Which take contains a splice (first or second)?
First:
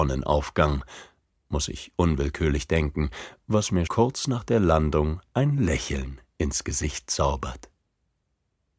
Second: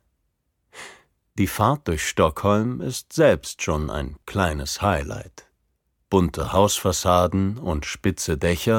first